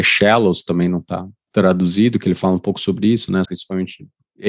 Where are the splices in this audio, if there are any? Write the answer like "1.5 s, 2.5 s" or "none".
3.4 s